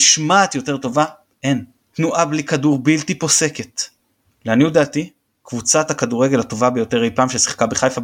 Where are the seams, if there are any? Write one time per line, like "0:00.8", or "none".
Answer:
0:01.8
0:04.2